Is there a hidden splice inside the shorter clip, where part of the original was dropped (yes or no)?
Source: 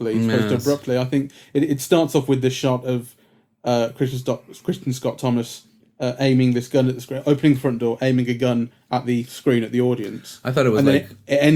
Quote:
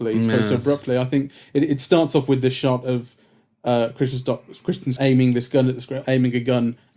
yes